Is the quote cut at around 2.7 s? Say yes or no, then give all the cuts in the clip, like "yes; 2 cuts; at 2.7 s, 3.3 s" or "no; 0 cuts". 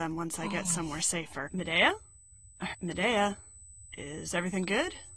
yes; 2 cuts; at 1.5 s, 2.7 s